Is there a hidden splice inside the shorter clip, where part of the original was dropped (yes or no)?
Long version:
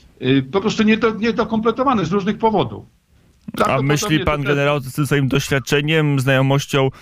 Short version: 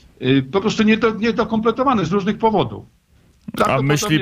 no